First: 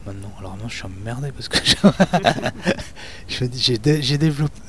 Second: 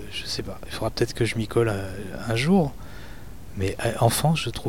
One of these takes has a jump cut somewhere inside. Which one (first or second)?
second